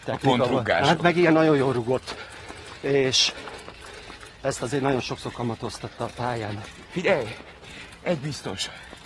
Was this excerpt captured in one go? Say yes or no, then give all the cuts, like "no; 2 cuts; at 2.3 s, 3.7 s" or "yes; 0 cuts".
yes; 0 cuts